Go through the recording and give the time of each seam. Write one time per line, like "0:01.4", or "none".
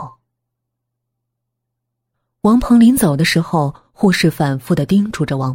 none